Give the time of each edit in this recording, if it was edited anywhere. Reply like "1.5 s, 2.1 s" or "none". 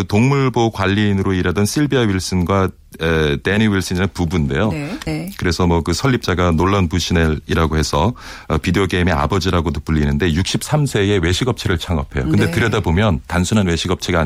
5.1 s